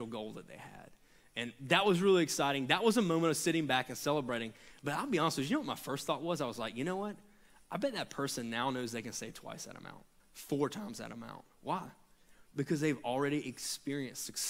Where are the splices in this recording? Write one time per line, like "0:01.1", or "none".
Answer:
0:10.2